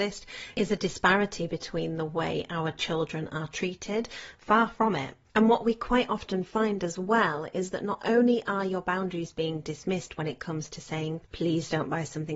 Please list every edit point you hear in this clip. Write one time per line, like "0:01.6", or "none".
0:04.3
0:11.2